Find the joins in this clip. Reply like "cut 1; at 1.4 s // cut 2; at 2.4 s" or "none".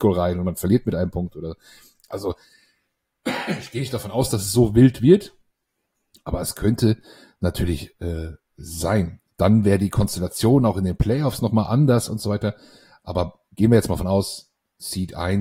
none